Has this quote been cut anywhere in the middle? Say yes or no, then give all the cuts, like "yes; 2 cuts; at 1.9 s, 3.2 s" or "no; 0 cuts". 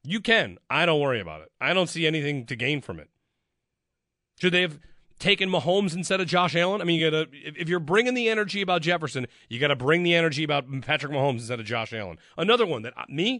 no; 0 cuts